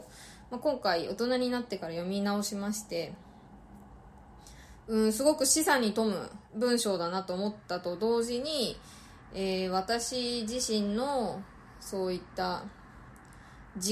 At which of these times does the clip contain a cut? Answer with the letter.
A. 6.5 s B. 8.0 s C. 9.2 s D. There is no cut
A